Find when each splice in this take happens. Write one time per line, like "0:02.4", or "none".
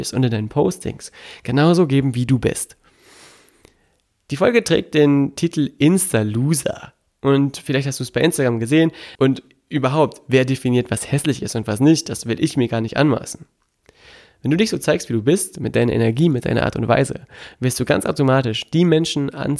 0:09.1